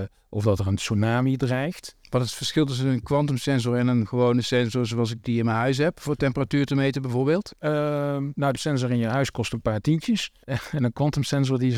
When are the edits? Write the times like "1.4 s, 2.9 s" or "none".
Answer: 10.4 s